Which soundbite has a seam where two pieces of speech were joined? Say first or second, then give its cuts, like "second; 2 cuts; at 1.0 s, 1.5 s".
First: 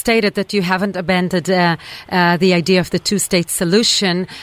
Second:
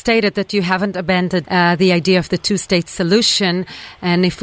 second; 1 cut; at 1.4 s